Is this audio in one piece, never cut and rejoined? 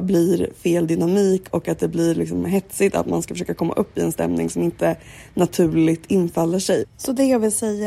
no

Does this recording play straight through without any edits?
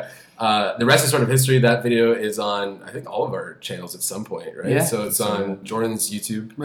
yes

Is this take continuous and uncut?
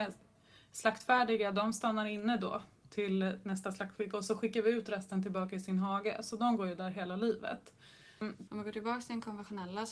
no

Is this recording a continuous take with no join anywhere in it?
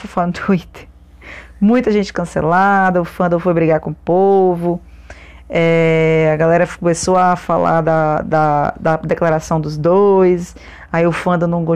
yes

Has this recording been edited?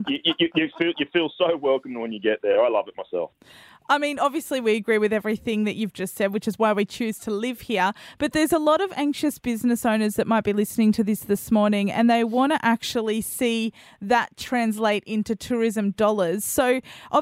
no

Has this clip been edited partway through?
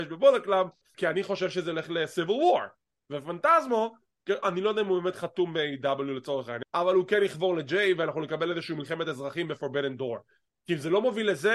yes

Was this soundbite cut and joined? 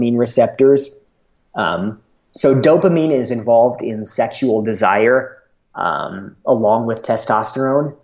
no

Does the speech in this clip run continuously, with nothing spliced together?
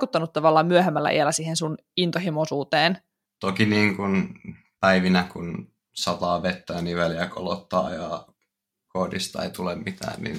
no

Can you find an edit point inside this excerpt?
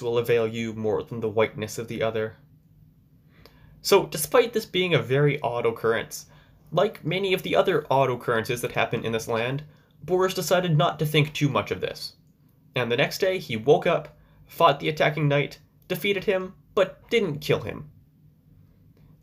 no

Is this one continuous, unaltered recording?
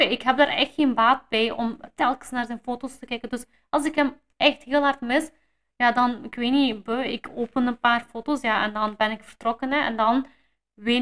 yes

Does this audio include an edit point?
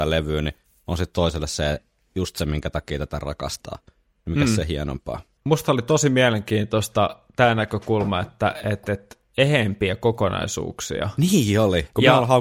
yes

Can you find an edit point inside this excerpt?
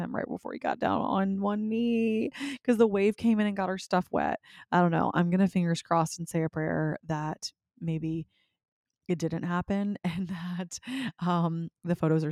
no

